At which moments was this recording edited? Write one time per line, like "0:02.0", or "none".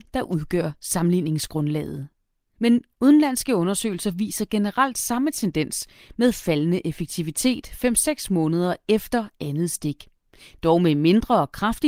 none